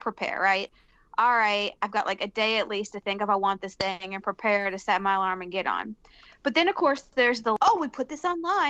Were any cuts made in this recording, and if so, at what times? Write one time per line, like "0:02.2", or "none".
none